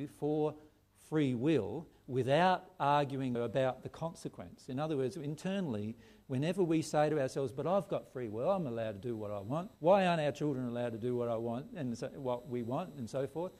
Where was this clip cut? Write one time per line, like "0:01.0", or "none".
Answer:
0:03.3
0:09.8